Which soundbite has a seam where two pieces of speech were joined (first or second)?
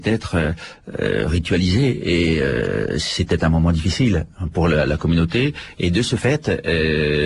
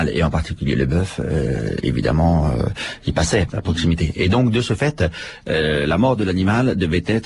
second